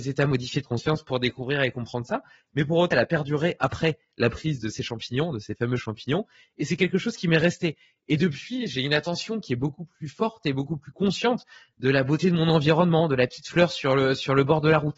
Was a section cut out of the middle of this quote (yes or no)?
yes